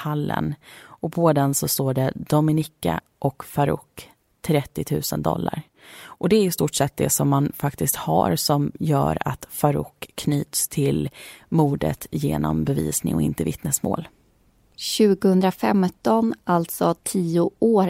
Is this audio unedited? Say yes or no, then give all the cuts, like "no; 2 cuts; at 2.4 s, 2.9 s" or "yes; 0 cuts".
yes; 0 cuts